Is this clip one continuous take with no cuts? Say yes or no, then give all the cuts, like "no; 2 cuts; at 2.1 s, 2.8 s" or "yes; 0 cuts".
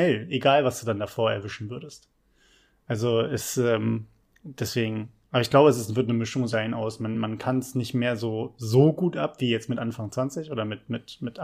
yes; 0 cuts